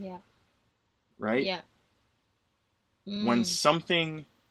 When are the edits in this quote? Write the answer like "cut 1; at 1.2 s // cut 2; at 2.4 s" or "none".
none